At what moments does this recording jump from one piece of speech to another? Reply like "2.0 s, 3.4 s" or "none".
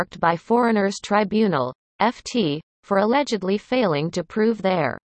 none